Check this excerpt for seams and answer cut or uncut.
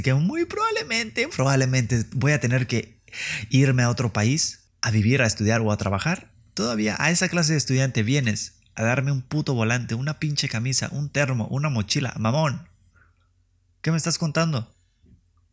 cut